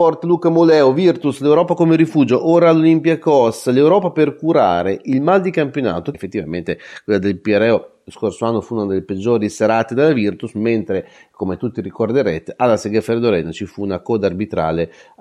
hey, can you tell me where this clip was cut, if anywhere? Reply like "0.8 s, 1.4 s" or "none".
6.1 s